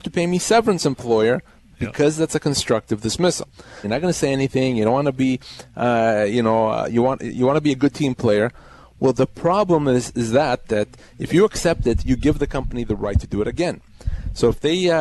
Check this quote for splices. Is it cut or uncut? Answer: cut